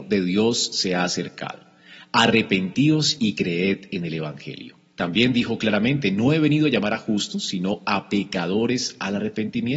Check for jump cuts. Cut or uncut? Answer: uncut